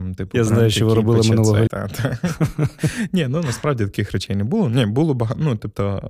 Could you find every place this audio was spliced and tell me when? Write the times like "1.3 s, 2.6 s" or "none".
1.7 s